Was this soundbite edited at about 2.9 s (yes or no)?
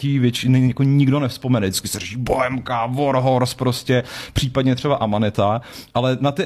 no